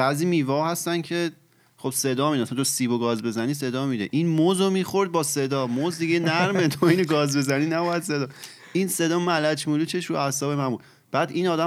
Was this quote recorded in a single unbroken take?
yes; 0 cuts

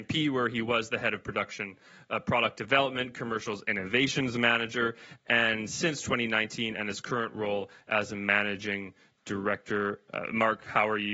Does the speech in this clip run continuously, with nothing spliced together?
yes; 0 cuts

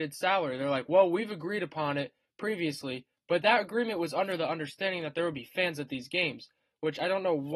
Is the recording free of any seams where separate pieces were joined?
yes; 0 cuts

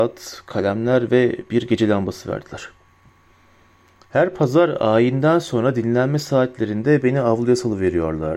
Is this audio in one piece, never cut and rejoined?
yes; 0 cuts

